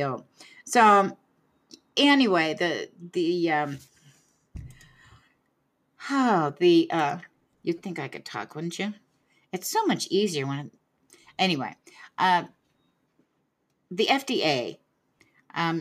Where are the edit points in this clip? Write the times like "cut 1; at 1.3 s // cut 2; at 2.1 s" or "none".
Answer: none